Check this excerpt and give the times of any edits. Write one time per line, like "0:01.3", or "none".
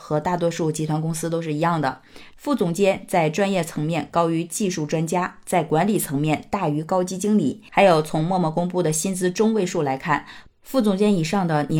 0:02.3
0:07.7

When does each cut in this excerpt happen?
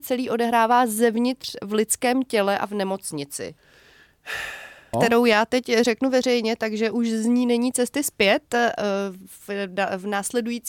0:04.9

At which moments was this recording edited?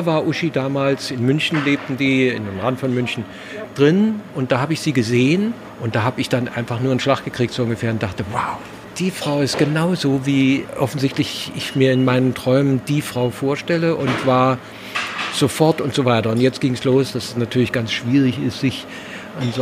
none

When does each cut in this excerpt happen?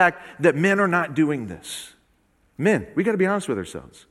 none

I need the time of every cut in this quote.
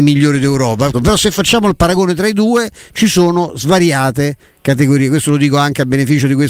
0:00.9

